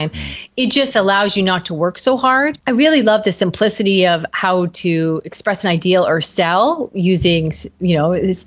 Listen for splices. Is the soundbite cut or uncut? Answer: cut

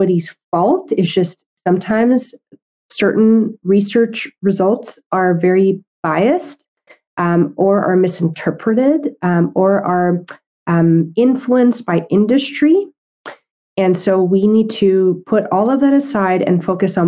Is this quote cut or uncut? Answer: uncut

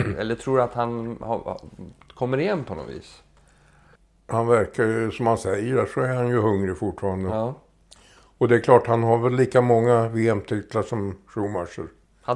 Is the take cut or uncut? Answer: uncut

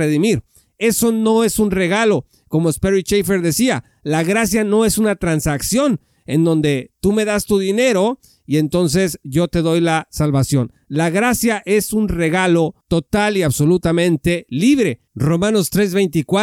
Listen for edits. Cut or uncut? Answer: uncut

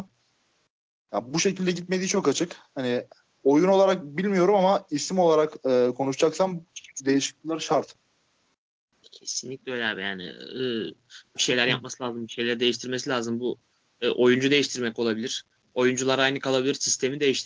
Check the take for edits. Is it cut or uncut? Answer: uncut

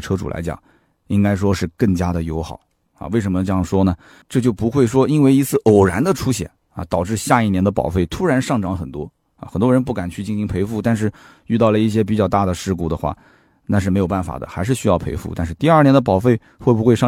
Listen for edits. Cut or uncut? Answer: cut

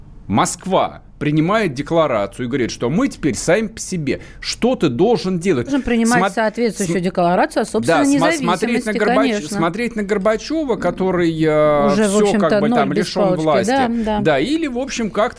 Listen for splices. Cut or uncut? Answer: cut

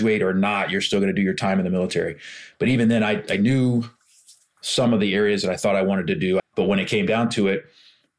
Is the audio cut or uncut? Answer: cut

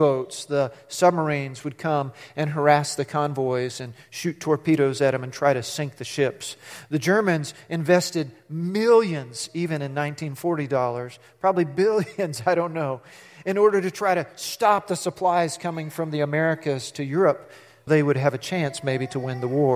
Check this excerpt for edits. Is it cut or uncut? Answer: cut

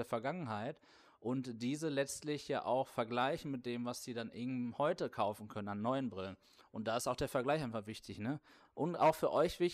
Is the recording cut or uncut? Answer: cut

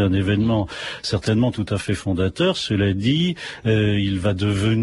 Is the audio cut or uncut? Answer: uncut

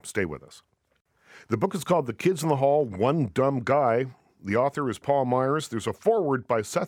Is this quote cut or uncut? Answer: uncut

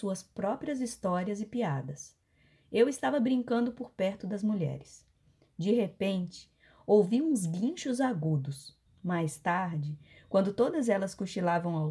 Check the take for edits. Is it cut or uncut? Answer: cut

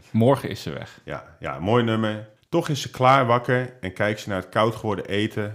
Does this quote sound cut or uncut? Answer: cut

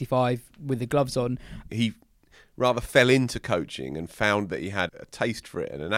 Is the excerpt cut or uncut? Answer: cut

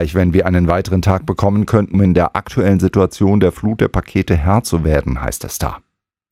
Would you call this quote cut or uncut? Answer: cut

